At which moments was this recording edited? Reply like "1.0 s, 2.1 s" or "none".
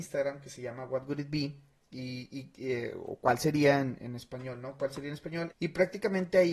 5.5 s